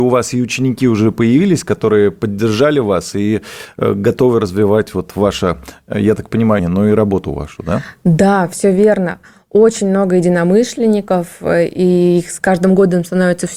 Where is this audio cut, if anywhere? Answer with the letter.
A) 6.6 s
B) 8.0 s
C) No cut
A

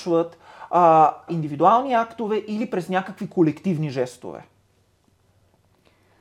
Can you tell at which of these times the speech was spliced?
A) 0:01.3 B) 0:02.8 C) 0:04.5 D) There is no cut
A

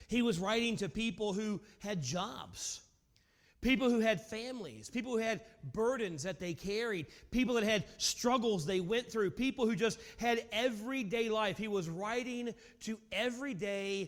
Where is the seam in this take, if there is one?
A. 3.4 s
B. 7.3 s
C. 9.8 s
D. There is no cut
D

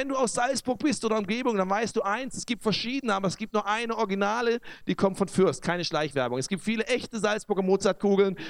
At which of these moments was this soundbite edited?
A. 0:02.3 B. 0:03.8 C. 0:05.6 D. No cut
D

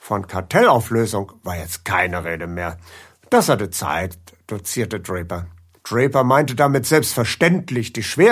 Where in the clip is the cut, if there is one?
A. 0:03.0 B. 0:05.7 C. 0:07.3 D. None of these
B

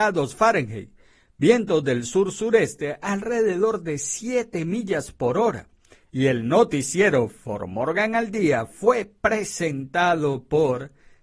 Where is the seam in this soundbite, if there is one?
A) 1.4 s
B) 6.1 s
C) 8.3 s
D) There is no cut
B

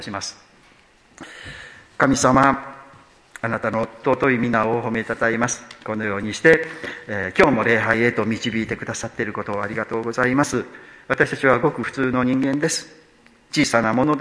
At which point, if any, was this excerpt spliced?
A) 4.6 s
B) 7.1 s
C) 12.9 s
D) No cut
D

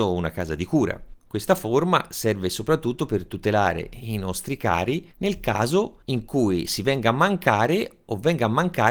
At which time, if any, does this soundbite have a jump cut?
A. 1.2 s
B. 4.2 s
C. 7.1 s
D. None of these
A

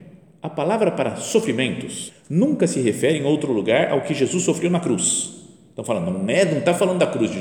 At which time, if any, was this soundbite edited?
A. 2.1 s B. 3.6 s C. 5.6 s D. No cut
A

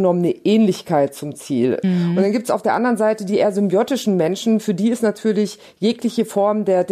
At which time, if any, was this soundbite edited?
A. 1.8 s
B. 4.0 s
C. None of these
A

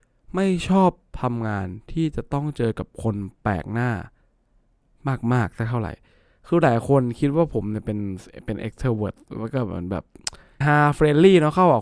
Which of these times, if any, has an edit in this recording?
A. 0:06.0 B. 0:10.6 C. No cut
B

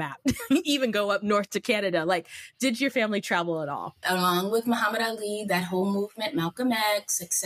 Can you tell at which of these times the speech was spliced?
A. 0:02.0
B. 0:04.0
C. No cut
B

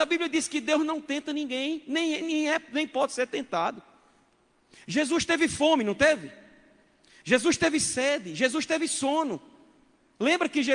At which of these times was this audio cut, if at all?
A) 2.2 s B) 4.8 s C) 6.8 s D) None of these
A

